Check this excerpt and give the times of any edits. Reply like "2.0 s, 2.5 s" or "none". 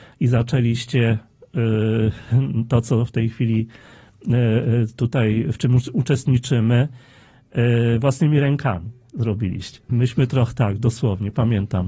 9.9 s